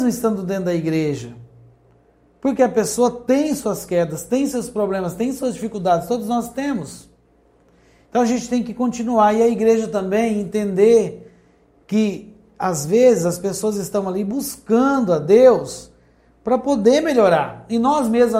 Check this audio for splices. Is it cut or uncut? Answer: uncut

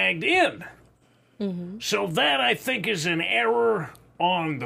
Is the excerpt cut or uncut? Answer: uncut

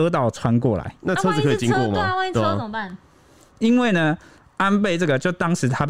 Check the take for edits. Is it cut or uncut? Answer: cut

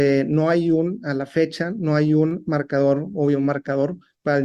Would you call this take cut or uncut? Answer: uncut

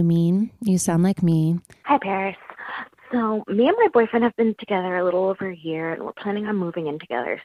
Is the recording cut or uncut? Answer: cut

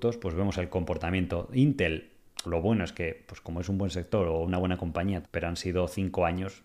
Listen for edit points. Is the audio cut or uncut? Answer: cut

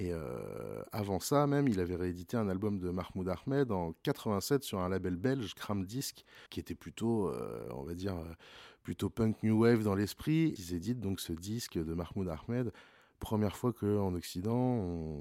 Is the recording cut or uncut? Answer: cut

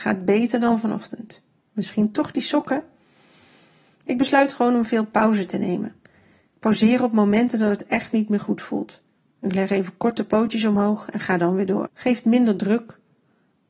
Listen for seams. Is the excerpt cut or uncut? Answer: cut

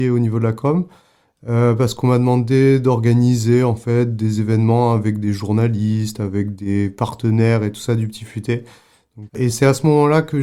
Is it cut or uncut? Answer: cut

